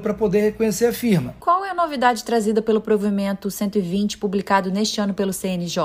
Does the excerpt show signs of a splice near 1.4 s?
no; 0 cuts

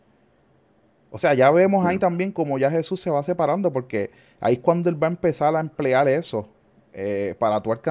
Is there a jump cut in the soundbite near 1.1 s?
no; 0 cuts

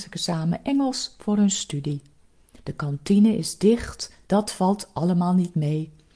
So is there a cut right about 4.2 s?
yes; 2 cuts; at 2.6 s, 4.2 s

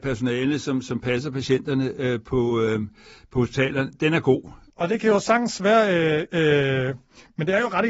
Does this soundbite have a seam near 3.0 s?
no; 2 cuts; at 4.7 s, 6.3 s

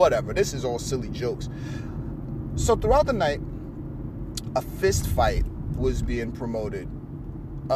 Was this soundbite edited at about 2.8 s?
no; 0 cuts

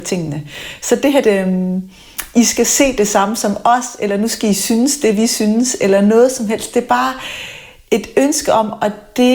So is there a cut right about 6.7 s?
no; 1 cut; at 1.2 s

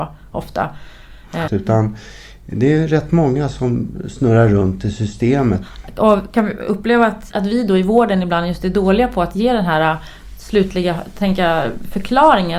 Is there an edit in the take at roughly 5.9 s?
no; 2 cuts; at 1.5 s, 7.3 s

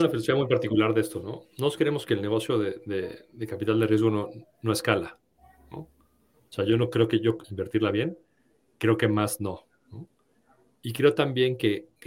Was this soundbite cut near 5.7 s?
no; 1 cut; at 7.4 s

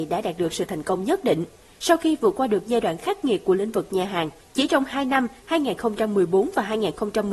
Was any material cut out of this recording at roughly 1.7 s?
no; 1 cut; at 4.4 s

